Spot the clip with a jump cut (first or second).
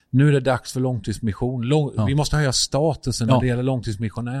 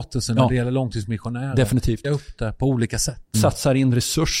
second